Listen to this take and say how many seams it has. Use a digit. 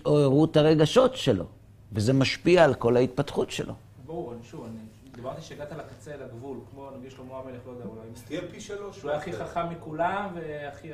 0